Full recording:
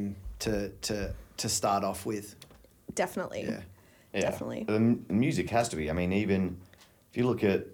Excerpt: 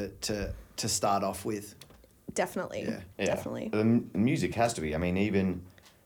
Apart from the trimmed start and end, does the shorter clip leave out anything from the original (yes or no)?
yes